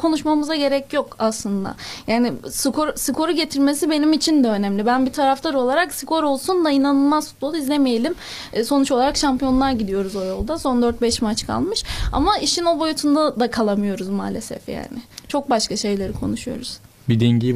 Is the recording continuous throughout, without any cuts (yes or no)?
yes